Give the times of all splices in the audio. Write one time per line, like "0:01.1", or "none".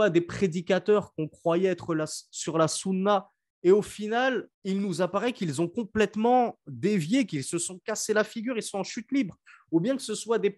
0:04.5